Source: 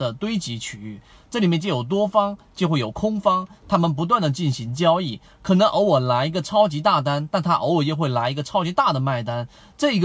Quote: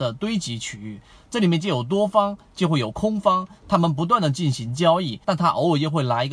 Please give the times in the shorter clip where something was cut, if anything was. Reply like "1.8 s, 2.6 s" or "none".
5.2 s